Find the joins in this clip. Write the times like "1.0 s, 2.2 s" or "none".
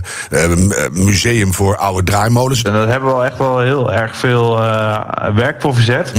2.6 s